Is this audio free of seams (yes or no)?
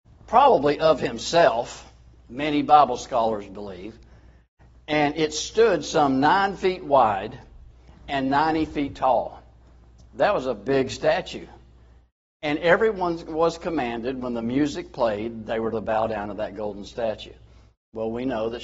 yes